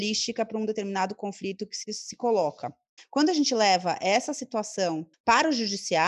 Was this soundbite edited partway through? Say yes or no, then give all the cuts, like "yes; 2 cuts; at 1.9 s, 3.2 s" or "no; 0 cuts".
yes; 2 cuts; at 3.0 s, 5.1 s